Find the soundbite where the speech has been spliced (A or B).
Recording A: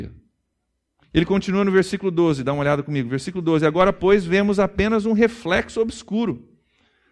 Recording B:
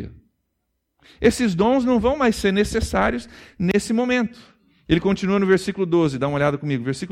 A